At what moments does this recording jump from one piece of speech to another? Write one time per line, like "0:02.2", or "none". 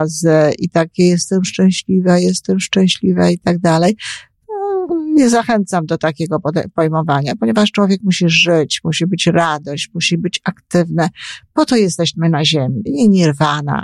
0:12.9